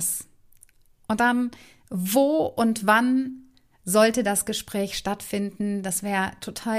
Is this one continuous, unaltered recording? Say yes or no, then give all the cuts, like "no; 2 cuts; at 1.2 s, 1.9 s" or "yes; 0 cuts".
yes; 0 cuts